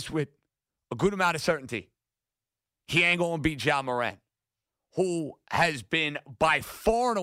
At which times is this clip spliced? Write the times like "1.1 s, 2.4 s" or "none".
none